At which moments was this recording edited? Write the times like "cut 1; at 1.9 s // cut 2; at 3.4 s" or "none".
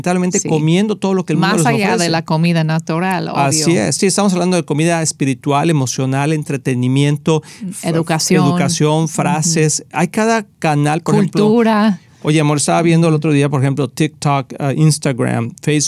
none